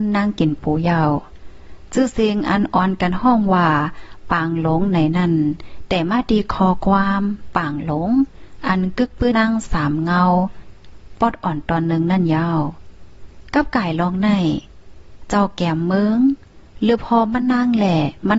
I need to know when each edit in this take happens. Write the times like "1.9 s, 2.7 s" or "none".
9.3 s